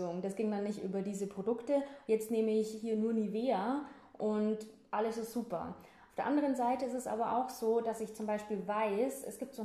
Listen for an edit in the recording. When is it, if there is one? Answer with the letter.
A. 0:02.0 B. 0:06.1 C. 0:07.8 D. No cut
A